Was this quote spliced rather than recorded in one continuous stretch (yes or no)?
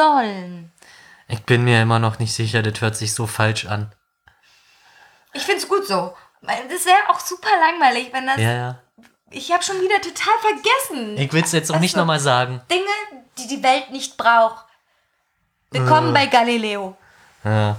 no